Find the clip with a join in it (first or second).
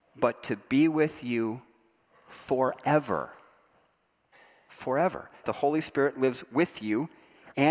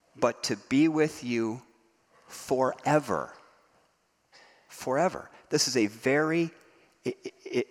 first